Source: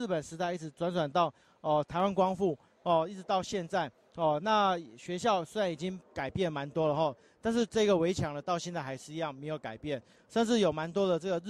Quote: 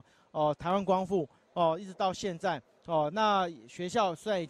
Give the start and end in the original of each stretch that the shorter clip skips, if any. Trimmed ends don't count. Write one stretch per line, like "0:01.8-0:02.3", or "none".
none